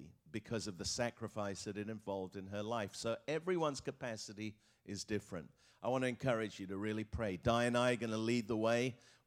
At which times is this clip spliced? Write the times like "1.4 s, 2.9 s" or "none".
none